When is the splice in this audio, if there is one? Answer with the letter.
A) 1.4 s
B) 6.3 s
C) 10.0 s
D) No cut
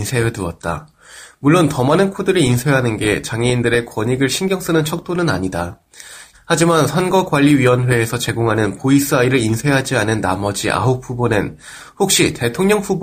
B